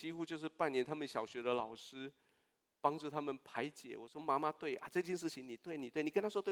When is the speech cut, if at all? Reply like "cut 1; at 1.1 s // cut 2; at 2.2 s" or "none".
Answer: none